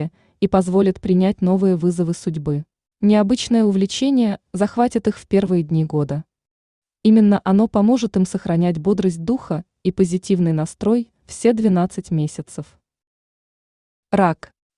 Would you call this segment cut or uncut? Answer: cut